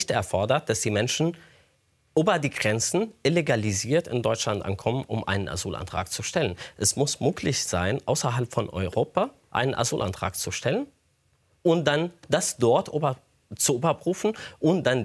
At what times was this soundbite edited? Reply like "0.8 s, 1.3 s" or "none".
none